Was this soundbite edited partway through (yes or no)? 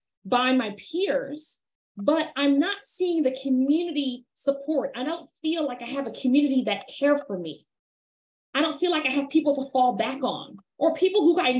no